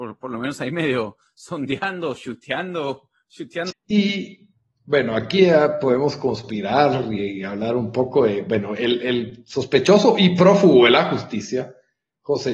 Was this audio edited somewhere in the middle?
yes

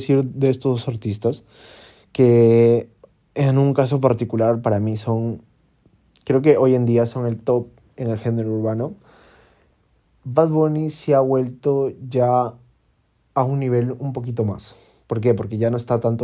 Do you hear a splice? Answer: no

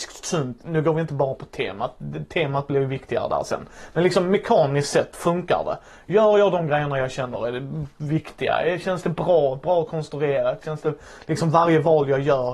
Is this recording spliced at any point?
no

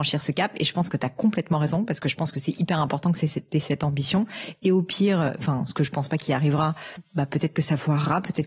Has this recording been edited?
no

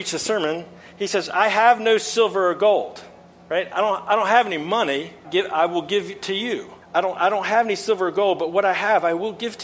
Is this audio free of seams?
no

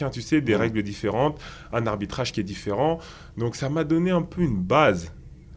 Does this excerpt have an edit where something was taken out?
no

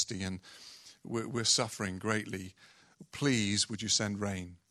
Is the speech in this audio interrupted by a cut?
no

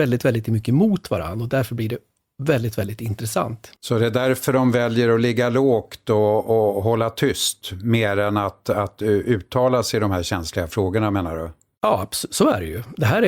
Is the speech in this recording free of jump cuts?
no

